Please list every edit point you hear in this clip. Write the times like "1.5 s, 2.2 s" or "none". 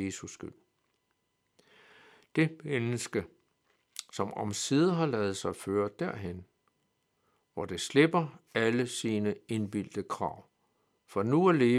none